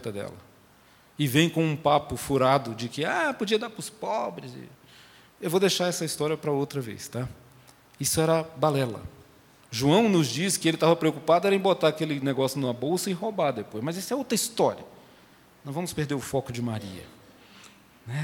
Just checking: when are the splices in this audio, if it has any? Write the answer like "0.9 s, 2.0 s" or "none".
9.6 s